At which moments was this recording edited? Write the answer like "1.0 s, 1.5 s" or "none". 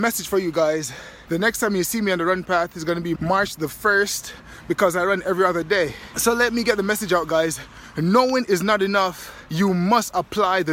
3.2 s